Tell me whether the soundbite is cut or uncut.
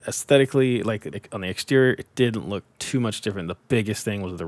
cut